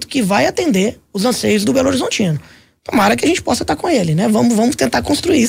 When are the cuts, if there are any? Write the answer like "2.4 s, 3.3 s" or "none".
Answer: none

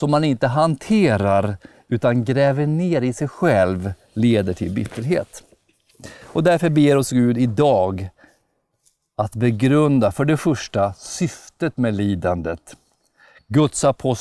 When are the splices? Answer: none

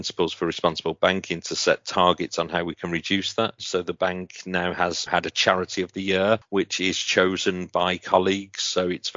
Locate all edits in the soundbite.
3.6 s, 5.1 s

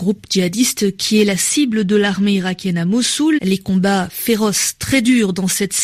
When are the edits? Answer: 3.4 s

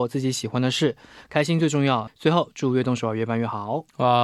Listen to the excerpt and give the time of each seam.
2.1 s

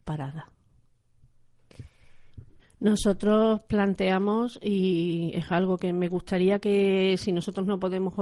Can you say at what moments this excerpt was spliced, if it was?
2.6 s

